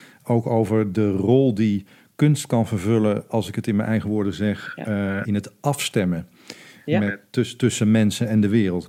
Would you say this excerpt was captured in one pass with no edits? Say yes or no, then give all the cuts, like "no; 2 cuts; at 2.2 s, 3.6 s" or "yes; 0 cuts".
no; 1 cut; at 5.2 s